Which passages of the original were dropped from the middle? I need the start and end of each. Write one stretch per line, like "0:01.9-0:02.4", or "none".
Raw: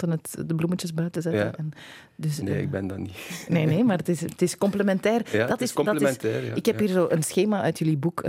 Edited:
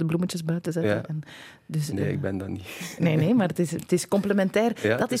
none

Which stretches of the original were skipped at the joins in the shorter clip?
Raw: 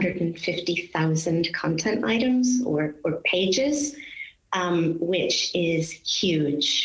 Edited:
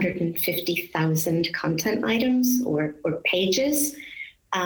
none

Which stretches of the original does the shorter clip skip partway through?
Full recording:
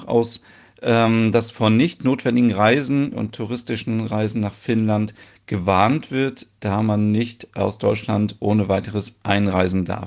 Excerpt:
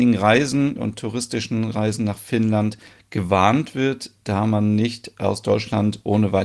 none

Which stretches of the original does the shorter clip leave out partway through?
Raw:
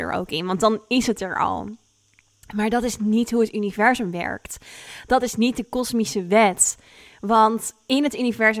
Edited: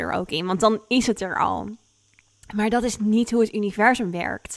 none

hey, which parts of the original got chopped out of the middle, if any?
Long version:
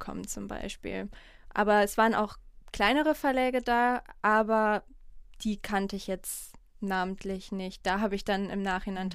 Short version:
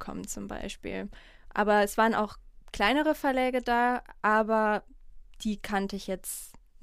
none

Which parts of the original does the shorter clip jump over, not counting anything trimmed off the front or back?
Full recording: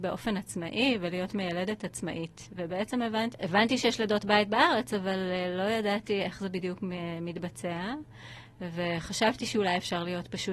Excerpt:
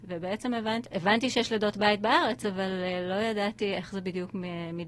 none

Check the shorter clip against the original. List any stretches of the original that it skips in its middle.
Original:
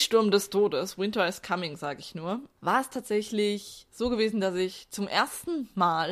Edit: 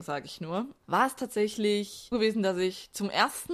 0:03.9-0:04.1

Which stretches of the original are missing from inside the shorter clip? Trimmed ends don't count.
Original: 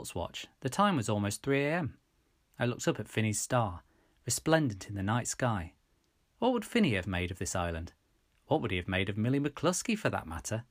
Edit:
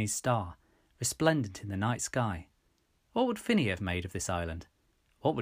none

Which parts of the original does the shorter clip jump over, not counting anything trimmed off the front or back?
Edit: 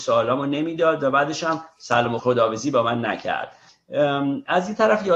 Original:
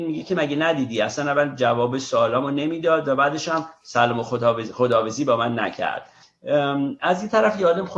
0:04.2-0:04.7

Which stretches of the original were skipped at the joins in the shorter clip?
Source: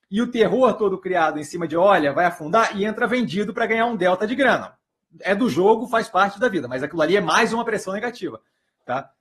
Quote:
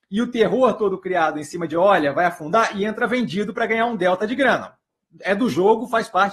none

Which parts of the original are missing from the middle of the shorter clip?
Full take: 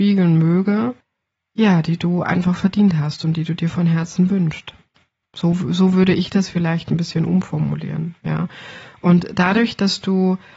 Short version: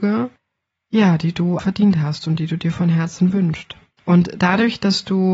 0:02.2-0:02.6
0:05.0-0:09.0

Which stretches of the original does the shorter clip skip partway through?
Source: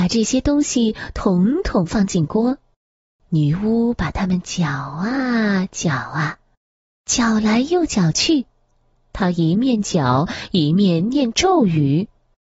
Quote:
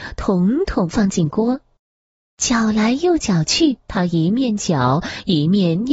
0:03.2-0:06.9
0:08.5-0:09.1

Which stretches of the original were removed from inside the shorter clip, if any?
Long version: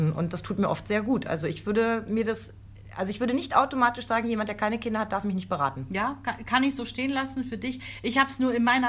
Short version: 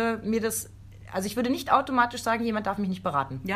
0:04.5-0:05.1

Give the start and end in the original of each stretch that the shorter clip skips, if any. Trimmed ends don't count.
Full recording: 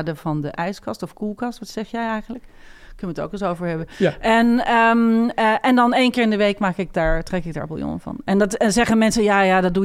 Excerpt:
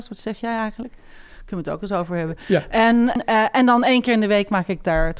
0:04.7-0:05.3

